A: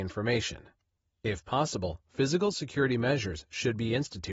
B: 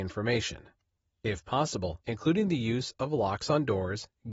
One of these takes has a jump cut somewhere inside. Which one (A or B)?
B